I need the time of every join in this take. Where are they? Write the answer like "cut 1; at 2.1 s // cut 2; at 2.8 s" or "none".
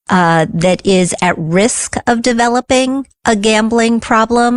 none

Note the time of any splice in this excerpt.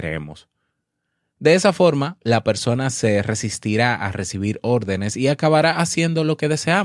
none

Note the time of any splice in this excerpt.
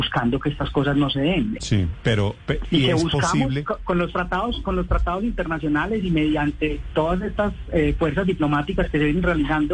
cut 1; at 1.6 s

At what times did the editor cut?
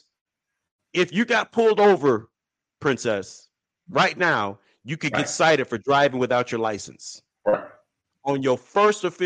none

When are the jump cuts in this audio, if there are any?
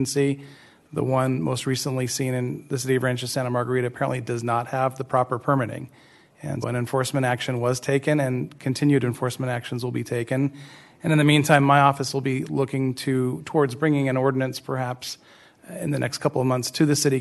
cut 1; at 6.6 s

